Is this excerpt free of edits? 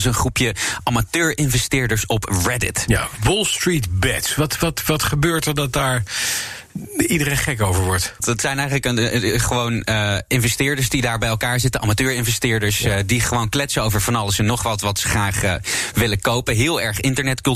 no; 1 cut; at 8.2 s

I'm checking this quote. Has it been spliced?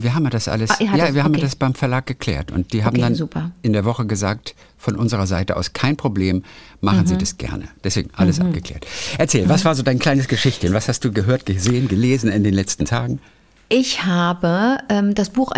no; 0 cuts

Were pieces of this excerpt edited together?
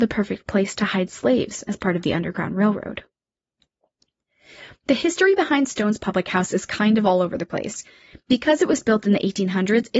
no; 0 cuts

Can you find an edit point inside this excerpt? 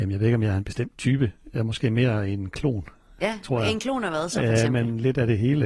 no; 0 cuts

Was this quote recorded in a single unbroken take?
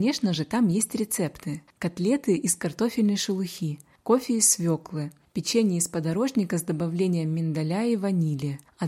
yes; 0 cuts

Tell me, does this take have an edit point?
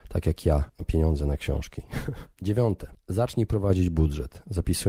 yes; 1 cut; at 2.3 s

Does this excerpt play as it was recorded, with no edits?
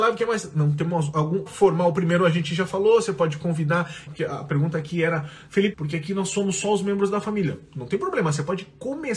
no; 3 cuts; at 1.5 s, 4.1 s, 5.7 s

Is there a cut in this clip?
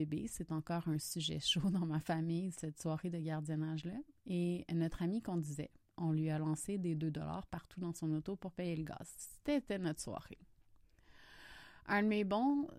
yes; 1 cut; at 2.5 s

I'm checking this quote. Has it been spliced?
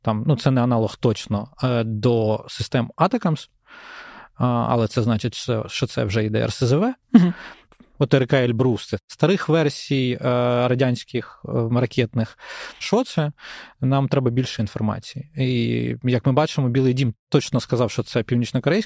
yes; 2 cuts; at 7.6 s, 12.8 s

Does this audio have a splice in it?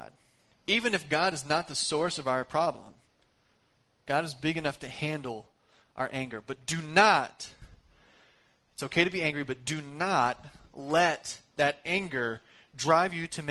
no; 0 cuts

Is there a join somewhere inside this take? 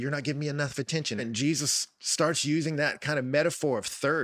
yes; 1 cut; at 1.2 s

